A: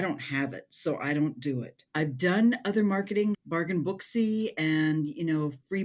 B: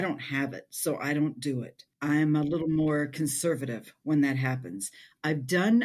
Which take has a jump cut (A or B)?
A